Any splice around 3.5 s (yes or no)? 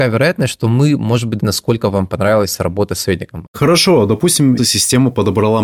yes